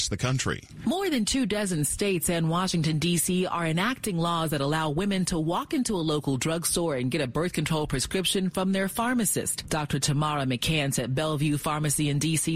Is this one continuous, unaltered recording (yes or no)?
yes